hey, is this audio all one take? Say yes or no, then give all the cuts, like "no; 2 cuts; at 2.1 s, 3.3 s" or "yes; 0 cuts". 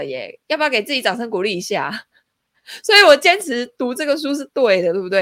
yes; 0 cuts